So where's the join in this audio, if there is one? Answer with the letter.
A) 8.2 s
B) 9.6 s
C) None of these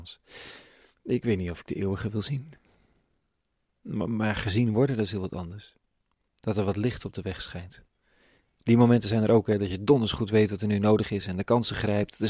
C